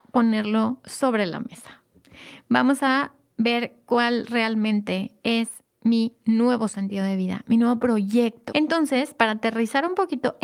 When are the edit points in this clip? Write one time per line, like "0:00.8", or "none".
0:08.5